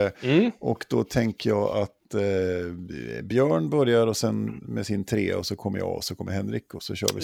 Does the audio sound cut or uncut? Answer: uncut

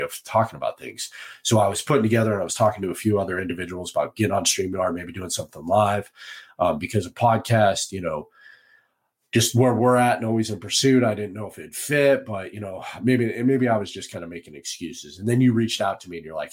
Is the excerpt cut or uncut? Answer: uncut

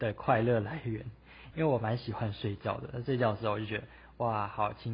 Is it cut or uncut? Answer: uncut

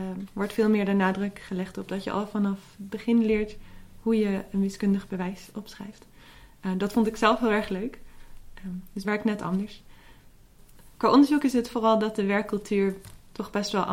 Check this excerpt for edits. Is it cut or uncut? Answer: cut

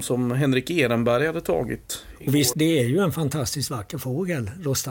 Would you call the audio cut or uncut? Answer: cut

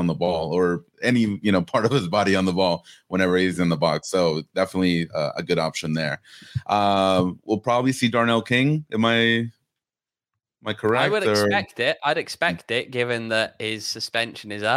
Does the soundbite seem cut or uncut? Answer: uncut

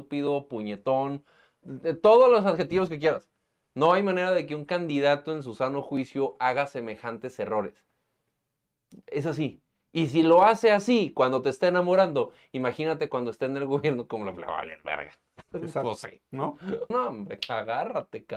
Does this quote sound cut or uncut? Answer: cut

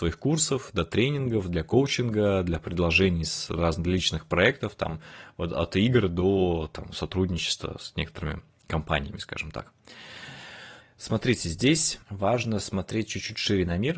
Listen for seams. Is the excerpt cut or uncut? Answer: cut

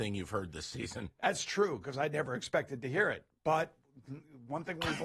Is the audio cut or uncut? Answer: uncut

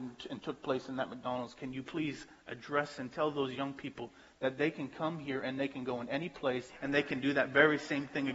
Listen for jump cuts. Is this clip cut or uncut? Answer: cut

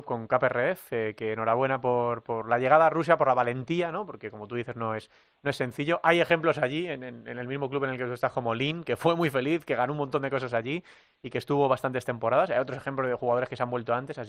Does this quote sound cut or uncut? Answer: uncut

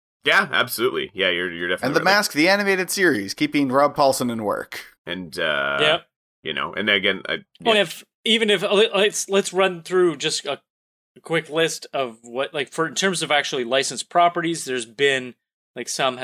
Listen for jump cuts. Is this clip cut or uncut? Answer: cut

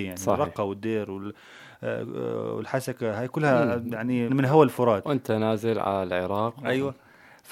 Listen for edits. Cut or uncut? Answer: cut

